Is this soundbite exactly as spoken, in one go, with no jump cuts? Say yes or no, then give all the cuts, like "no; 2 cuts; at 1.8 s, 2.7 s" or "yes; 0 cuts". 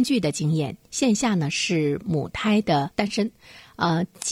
yes; 0 cuts